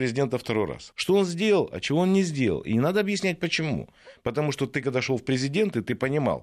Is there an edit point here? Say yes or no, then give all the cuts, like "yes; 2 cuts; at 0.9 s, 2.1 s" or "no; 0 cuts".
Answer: yes; 1 cut; at 0.9 s